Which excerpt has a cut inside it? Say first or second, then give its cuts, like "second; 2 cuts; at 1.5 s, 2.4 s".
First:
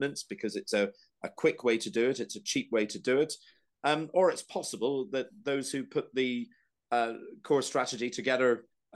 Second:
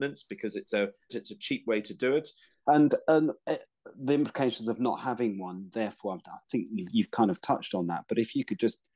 second; 2 cuts; at 1.1 s, 2.7 s